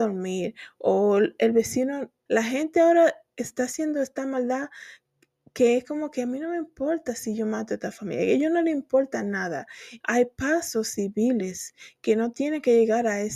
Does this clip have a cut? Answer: yes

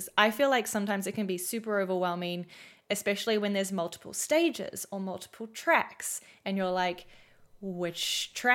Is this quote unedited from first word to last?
yes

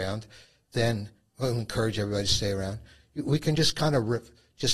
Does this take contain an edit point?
no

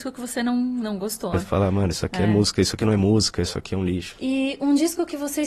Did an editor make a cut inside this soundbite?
yes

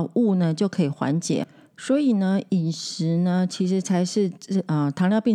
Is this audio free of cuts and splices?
yes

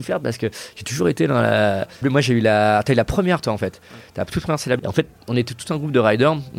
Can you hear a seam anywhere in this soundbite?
yes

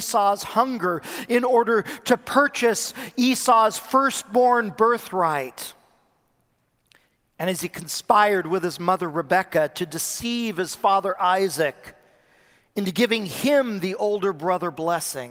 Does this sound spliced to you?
no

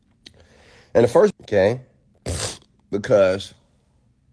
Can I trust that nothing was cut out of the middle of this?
no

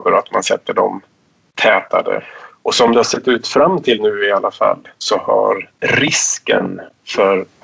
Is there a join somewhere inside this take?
yes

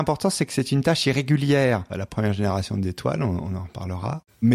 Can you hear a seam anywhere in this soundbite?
yes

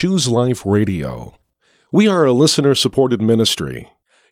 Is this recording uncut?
yes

